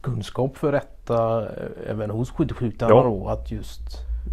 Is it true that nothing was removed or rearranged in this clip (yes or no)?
yes